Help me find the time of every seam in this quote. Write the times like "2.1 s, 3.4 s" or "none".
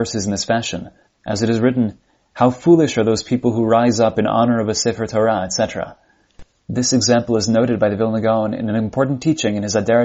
1.0 s, 6.6 s